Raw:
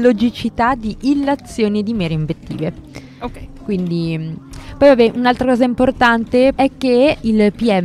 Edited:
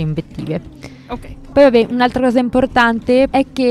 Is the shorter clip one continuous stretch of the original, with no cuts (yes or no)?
no